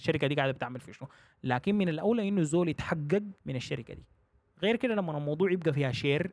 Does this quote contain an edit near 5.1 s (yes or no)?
no